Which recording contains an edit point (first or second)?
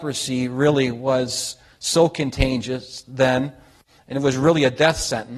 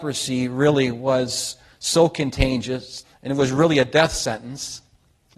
second